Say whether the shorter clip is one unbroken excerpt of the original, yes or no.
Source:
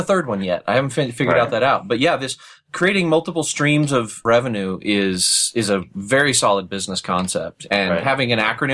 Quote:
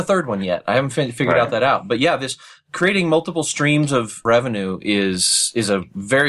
yes